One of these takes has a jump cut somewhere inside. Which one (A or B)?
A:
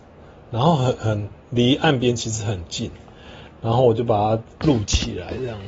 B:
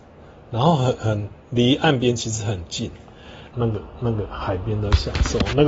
B